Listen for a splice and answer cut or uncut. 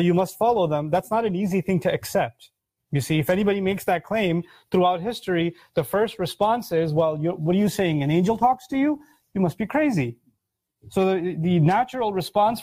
uncut